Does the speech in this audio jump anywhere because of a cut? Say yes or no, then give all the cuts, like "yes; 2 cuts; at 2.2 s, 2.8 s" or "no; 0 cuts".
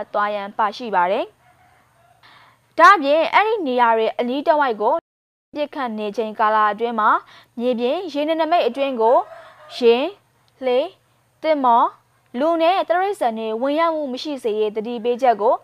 no; 0 cuts